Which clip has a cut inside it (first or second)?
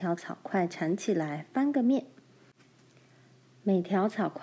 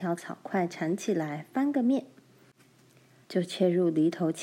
second